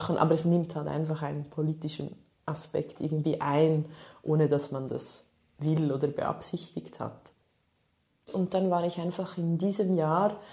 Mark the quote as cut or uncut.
uncut